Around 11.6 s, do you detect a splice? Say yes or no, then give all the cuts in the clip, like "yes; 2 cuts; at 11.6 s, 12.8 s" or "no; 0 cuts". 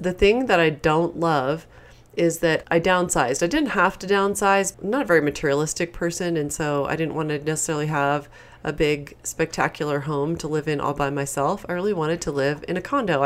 no; 2 cuts; at 2.6 s, 4.7 s